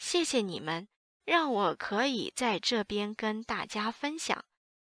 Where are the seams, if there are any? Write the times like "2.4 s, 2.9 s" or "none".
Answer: 1.2 s